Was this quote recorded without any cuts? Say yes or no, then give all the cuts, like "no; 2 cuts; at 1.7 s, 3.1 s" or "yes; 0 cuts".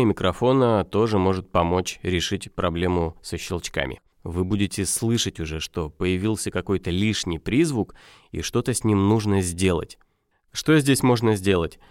no; 2 cuts; at 4.1 s, 10.3 s